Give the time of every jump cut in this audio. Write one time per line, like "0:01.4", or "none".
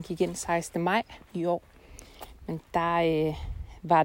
0:01.3